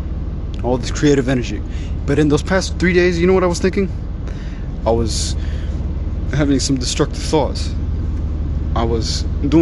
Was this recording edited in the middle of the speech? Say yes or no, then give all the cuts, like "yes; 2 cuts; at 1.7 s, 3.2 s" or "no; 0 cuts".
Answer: yes; 1 cut; at 4.8 s